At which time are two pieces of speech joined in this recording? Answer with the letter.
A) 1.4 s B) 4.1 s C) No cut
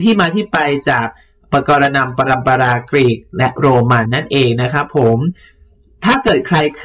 B